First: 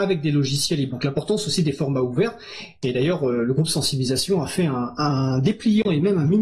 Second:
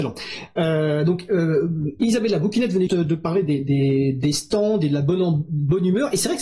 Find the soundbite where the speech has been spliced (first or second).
second